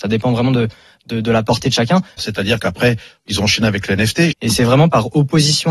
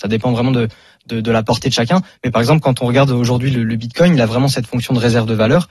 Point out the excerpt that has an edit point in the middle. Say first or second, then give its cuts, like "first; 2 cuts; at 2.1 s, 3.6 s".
first; 2 cuts; at 2.2 s, 4.3 s